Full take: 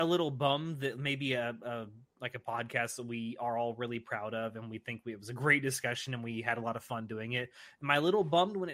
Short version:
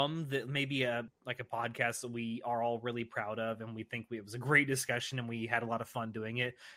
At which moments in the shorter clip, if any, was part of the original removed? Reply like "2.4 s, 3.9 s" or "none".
1.1 s